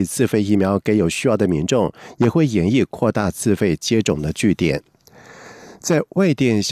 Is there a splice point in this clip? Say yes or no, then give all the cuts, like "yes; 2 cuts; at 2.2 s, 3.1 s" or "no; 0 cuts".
no; 0 cuts